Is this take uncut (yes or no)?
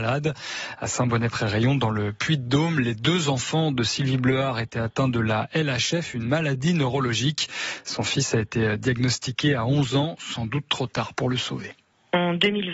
yes